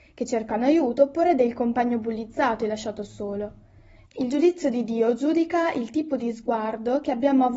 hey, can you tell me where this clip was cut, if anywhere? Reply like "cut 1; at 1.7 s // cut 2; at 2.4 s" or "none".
cut 1; at 4.0 s